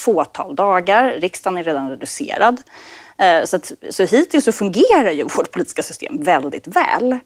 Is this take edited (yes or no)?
no